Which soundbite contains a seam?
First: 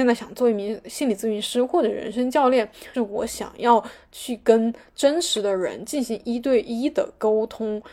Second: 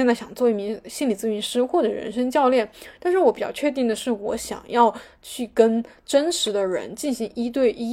first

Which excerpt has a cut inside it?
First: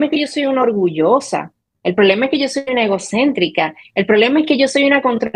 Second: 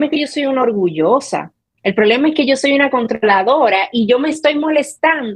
second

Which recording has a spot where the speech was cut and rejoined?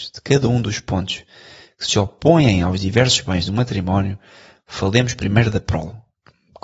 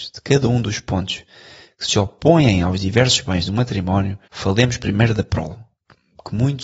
second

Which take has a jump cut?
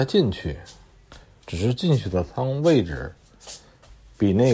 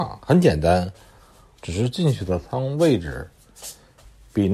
second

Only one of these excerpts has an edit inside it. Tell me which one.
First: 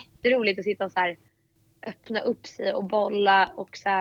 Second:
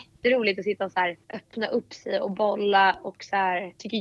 second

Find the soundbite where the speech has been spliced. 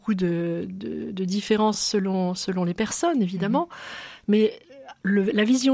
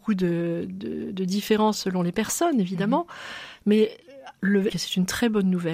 second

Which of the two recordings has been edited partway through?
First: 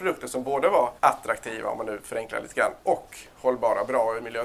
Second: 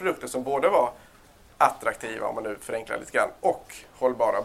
first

